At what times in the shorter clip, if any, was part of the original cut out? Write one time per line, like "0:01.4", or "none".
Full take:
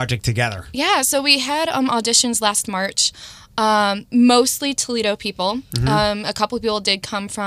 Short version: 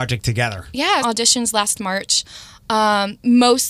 0:01.0